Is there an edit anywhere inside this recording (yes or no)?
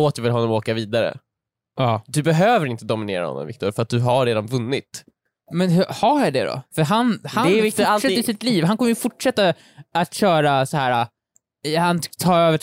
no